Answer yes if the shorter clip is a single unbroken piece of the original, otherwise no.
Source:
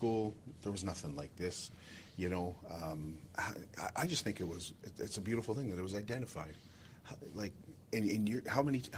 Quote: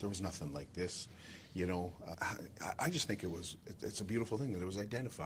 no